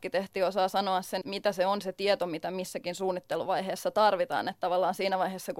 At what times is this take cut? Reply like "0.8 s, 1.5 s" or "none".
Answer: 1.2 s